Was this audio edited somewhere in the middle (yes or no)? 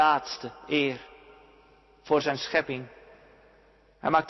no